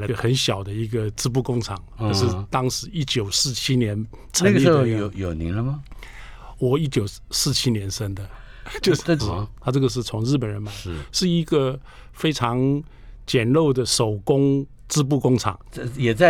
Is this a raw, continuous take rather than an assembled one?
no; 1 cut; at 9.2 s

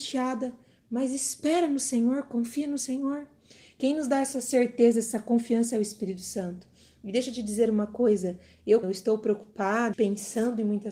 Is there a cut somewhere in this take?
yes; 2 cuts; at 8.8 s, 9.9 s

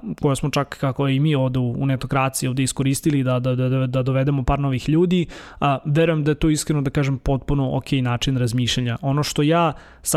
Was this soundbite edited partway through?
no; 0 cuts

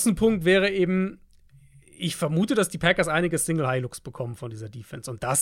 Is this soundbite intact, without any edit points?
yes; 0 cuts

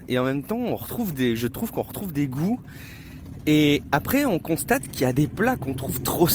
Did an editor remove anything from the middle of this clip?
no; 0 cuts

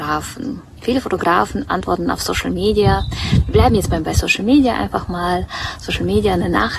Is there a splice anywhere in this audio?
no; 0 cuts

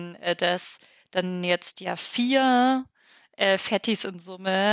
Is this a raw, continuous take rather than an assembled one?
yes; 0 cuts

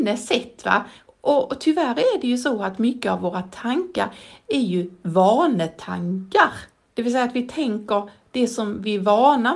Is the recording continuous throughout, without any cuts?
no; 1 cut; at 1.1 s

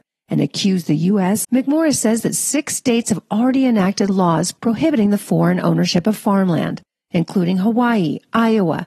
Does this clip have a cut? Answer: yes; 1 cut; at 1.4 s

